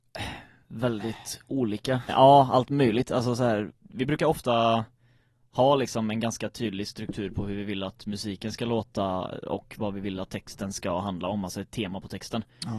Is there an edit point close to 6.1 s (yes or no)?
no